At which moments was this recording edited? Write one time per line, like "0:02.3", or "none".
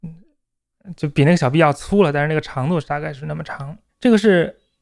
0:03.9